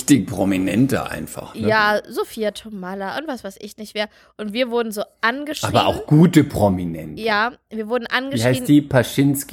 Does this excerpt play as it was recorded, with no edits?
yes; 0 cuts

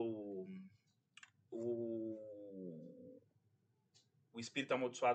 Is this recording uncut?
yes; 0 cuts

